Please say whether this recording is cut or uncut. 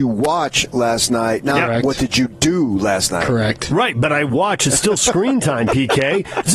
uncut